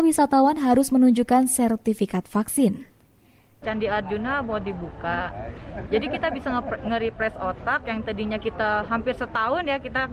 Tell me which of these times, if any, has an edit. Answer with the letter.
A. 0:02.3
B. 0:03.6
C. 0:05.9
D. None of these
B